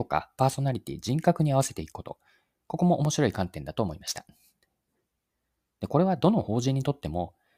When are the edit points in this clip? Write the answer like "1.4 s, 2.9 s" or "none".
none